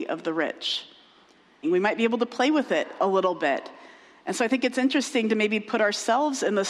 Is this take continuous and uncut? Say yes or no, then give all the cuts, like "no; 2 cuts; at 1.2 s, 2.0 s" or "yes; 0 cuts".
no; 1 cut; at 1.6 s